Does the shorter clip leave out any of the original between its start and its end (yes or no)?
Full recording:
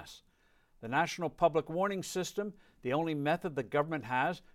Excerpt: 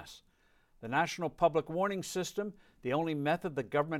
no